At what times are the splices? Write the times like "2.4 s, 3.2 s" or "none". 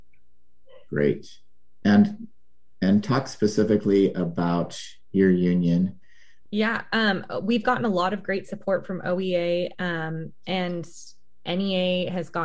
1.8 s, 6.5 s